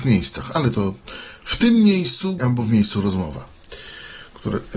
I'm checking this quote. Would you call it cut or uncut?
cut